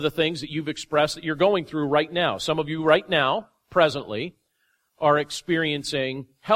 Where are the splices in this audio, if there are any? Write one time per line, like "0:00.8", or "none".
none